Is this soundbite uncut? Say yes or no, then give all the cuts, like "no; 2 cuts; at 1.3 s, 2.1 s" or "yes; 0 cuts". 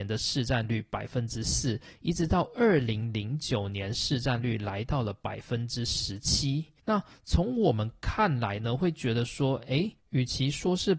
yes; 0 cuts